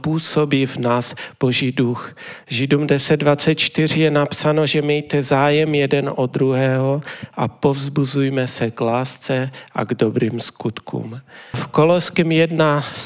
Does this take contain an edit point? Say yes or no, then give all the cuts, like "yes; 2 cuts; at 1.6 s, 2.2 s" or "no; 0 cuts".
yes; 2 cuts; at 2.4 s, 11.5 s